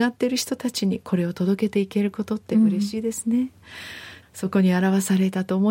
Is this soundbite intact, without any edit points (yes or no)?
no